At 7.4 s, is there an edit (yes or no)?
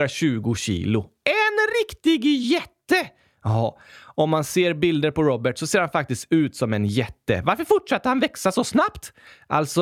no